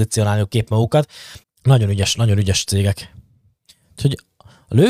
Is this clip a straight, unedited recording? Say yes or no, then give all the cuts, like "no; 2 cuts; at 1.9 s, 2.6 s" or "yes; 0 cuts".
no; 1 cut; at 1.4 s